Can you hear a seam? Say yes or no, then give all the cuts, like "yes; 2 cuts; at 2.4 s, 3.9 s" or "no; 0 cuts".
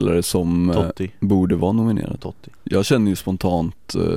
no; 0 cuts